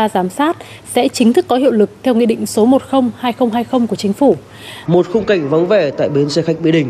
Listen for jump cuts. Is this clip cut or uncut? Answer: cut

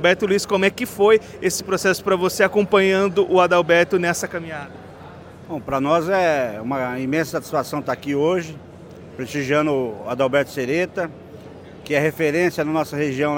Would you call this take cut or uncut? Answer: uncut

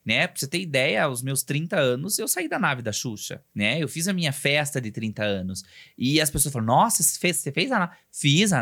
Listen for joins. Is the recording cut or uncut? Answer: cut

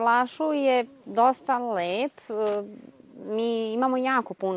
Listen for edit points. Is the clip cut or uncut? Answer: uncut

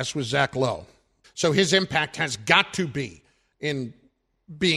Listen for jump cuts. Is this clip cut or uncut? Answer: cut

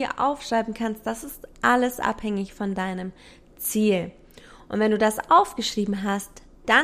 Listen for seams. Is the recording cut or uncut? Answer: uncut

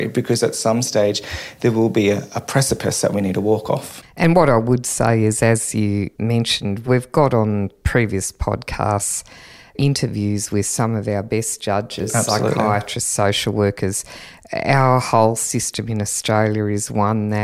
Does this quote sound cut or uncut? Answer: uncut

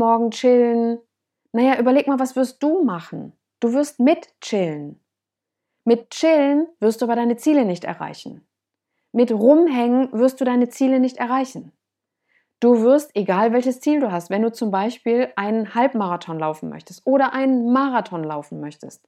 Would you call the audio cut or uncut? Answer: uncut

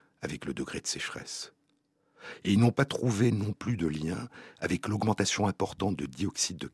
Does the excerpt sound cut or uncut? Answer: uncut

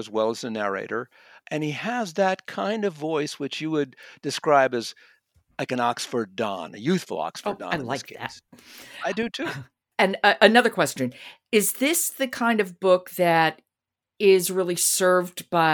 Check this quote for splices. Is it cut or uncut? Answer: uncut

